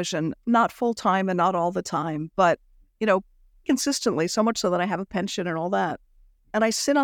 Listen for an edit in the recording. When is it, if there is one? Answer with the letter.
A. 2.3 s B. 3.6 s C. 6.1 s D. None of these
B